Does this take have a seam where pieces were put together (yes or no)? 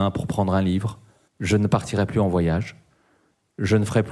yes